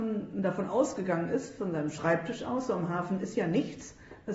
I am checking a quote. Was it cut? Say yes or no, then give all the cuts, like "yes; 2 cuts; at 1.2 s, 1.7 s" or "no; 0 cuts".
no; 0 cuts